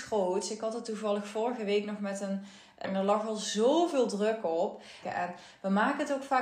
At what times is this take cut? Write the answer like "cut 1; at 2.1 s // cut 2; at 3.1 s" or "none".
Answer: cut 1; at 2.8 s // cut 2; at 5.0 s

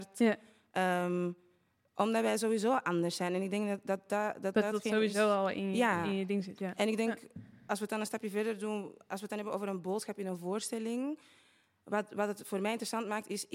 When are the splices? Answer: none

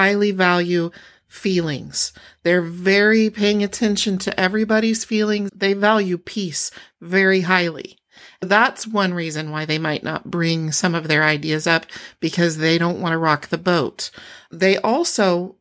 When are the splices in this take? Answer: cut 1; at 5.5 s

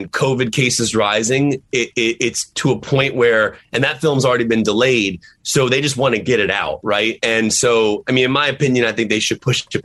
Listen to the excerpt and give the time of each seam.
none

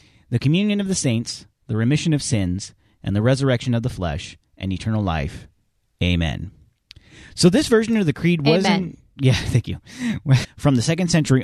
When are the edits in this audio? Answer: cut 1; at 10.4 s

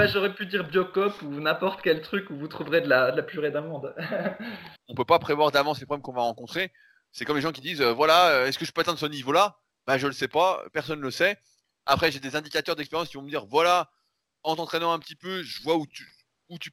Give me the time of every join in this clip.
cut 1; at 4.8 s

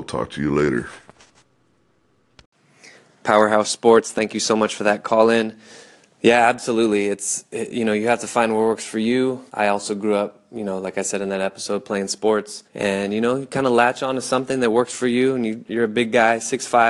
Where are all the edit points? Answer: cut 1; at 9.5 s // cut 2; at 12.7 s // cut 3; at 15.7 s

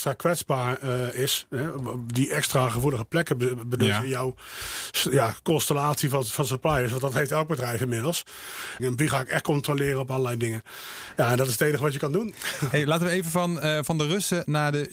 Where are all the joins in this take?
cut 1; at 8.8 s

